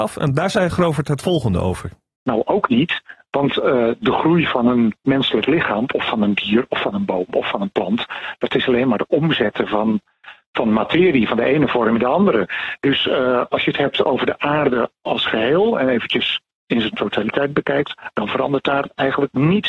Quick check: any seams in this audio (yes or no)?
no